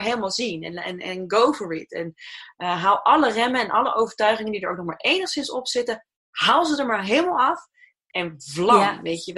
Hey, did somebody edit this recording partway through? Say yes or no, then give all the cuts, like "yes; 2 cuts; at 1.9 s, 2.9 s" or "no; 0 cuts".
no; 0 cuts